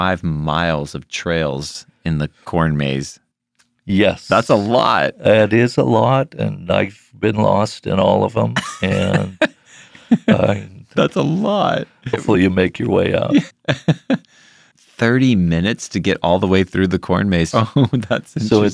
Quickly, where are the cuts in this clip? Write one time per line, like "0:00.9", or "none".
0:12.1
0:13.5
0:17.5

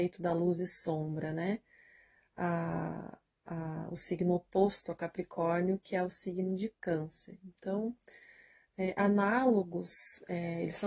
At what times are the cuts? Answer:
none

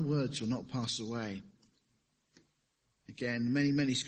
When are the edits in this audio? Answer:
none

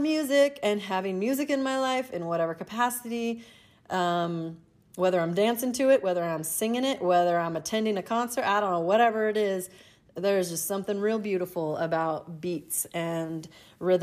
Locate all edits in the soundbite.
none

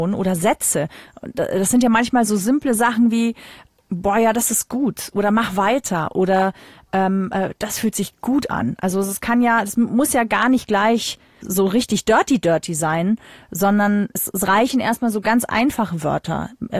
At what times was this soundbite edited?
none

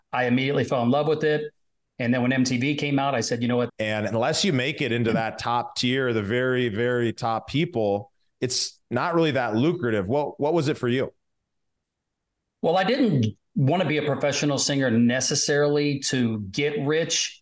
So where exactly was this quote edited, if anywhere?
0:03.7

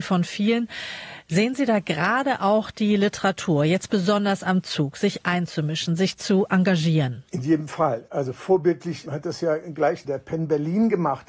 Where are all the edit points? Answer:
0:07.3

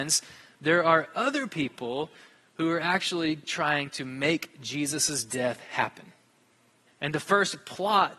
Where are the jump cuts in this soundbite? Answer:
0:06.9

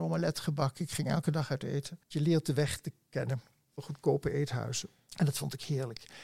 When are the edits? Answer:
0:02.0

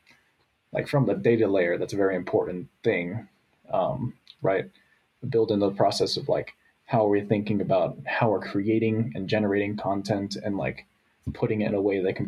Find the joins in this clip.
0:04.4

